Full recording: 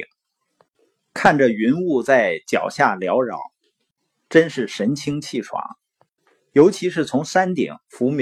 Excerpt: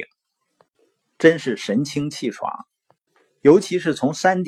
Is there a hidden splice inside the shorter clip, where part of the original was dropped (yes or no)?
yes